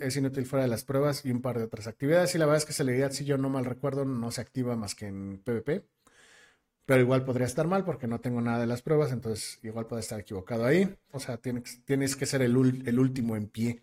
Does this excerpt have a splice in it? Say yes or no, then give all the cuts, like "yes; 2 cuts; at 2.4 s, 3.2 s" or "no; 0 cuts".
yes; 1 cut; at 11.1 s